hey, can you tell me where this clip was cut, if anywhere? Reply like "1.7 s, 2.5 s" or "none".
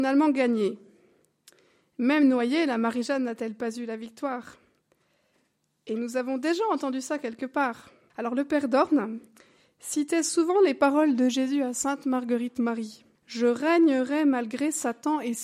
8.1 s, 13.2 s